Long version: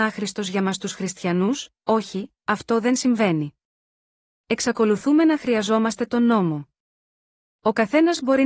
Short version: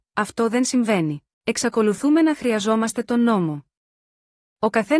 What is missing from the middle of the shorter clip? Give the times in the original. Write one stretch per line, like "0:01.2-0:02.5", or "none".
0:03.6-0:04.3